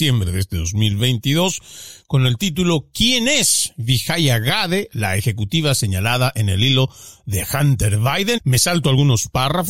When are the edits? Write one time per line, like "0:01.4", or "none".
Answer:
0:08.4